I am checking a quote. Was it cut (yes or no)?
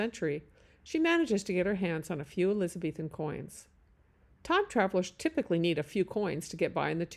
yes